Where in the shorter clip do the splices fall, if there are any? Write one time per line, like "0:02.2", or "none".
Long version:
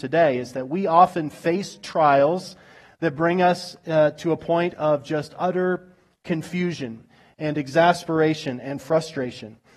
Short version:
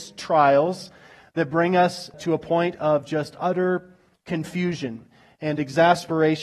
0:02.1